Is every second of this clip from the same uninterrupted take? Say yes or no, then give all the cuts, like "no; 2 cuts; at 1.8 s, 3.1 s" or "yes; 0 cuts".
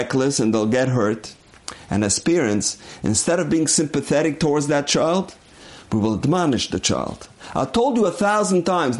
yes; 0 cuts